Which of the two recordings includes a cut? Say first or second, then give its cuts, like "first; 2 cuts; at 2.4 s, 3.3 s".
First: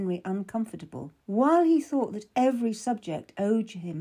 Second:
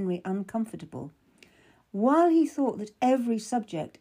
first; 1 cut; at 1.2 s